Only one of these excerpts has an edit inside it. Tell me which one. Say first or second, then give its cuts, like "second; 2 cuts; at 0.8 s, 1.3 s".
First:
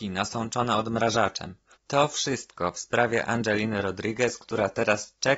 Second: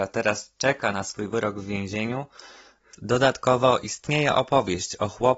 first; 1 cut; at 1.7 s